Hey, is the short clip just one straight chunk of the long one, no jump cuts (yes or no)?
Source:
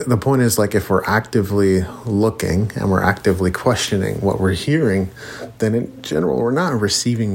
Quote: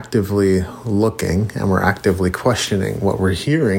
yes